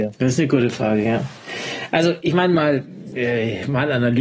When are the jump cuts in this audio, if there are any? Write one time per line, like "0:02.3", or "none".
none